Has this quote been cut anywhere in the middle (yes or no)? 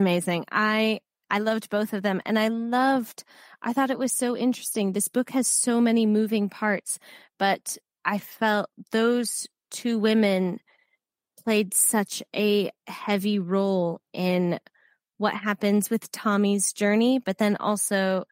no